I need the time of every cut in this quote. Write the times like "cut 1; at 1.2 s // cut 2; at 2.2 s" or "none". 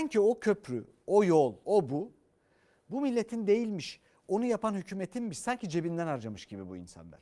cut 1; at 1.6 s